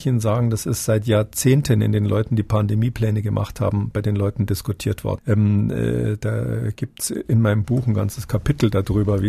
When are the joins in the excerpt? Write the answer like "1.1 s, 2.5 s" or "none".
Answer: 5.2 s

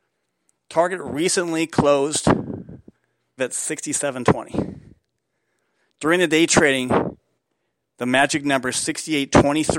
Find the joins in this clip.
3.4 s

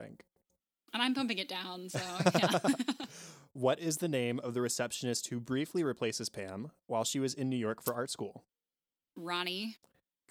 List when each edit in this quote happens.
none

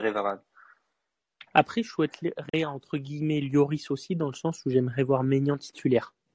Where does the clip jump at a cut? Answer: 1.5 s

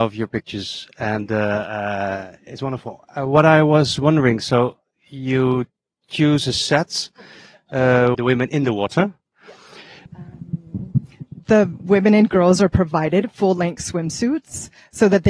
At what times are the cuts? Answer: 8.1 s, 10.1 s

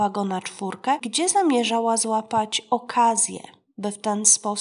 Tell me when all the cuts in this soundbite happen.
1.0 s

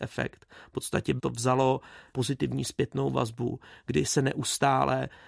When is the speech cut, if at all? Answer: none

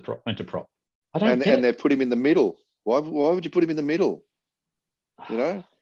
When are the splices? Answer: none

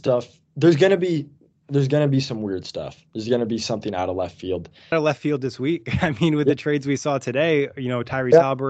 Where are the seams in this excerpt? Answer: 4.9 s

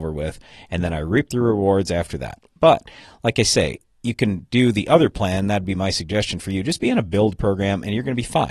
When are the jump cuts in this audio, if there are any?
none

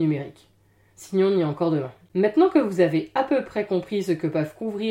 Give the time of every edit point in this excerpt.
2.1 s

